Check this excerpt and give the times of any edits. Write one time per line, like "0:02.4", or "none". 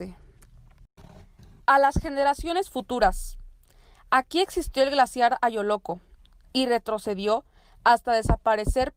none